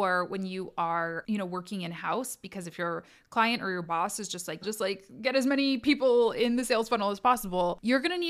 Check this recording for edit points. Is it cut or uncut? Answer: cut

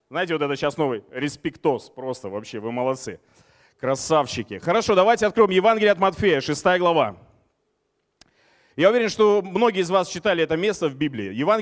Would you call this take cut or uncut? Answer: uncut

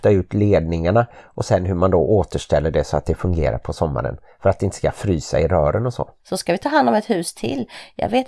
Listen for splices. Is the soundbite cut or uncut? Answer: cut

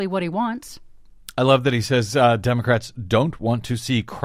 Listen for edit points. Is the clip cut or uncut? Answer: uncut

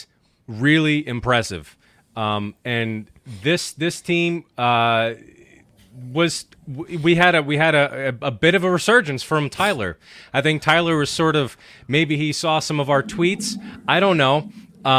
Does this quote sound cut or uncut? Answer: uncut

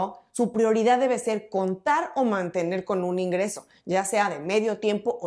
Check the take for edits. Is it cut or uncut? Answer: uncut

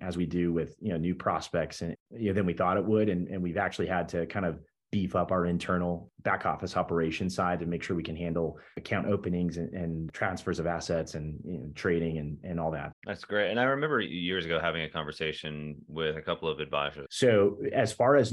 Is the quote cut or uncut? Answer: cut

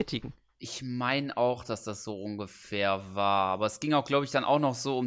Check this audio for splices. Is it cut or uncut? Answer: uncut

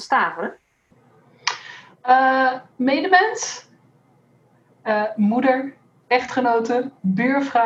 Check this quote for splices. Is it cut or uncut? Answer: cut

